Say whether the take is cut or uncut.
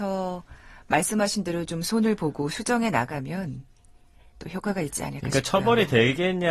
uncut